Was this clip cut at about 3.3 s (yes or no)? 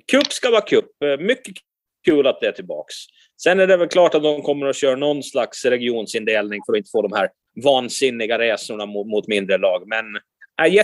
no